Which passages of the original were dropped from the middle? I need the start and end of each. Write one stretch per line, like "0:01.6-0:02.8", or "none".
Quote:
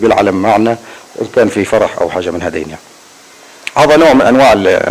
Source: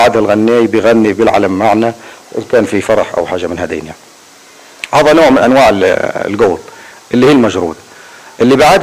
none